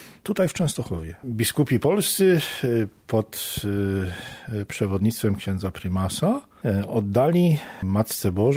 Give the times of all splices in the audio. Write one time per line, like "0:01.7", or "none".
none